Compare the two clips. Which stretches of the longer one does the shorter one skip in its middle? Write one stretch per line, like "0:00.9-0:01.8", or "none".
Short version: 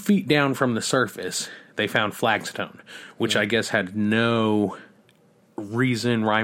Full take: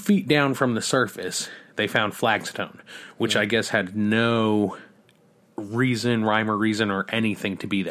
none